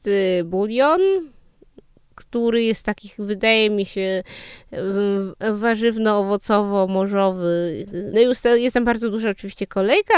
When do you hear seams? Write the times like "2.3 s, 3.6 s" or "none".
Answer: 8.1 s